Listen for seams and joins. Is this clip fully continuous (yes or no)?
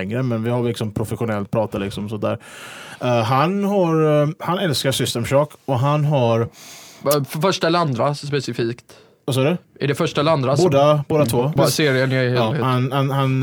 no